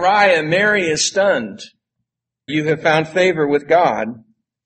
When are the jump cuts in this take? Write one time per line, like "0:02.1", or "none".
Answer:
0:02.5